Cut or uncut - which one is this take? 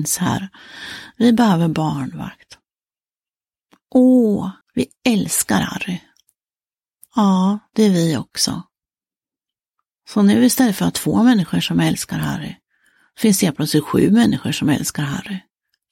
cut